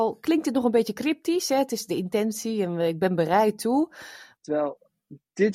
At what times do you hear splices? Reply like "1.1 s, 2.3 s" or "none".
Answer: 4.4 s